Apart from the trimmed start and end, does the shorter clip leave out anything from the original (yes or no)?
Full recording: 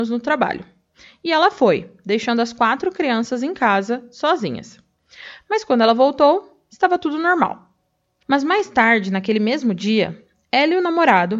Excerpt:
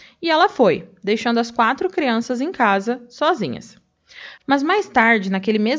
yes